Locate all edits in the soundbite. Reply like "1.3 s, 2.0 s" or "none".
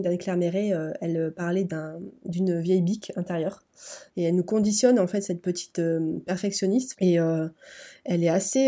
4.1 s, 6.9 s

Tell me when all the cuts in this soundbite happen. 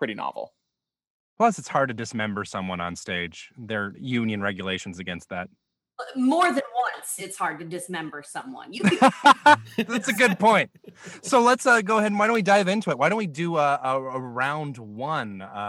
3.9 s

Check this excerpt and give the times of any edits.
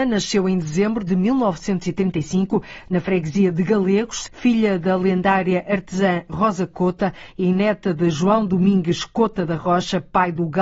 4.3 s

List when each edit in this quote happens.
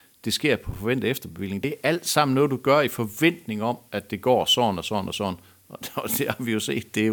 none

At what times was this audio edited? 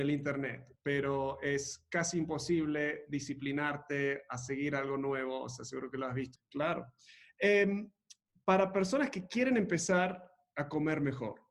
6.4 s

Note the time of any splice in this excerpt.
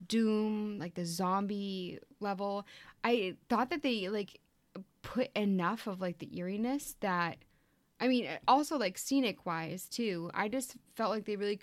none

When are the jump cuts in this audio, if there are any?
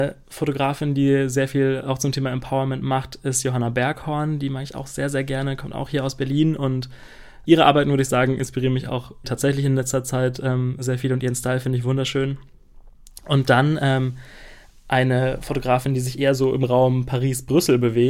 9.2 s

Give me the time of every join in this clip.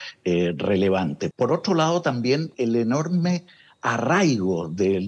1.3 s, 2.5 s

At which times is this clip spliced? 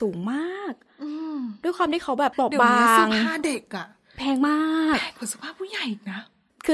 2.3 s

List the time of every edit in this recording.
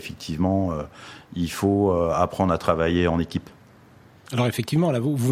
4.3 s

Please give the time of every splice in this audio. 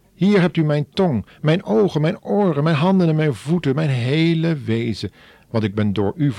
none

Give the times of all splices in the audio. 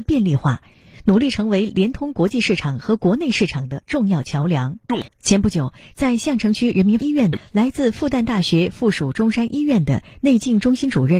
5.1 s

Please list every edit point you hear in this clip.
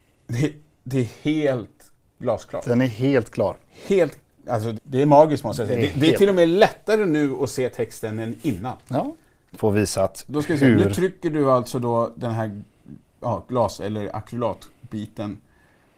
4.7 s, 9.5 s

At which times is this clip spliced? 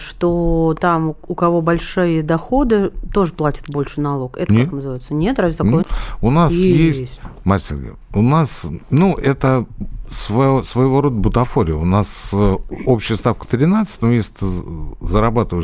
5.8 s

